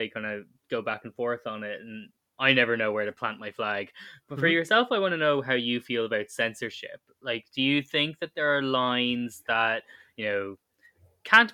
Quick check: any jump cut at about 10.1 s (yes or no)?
no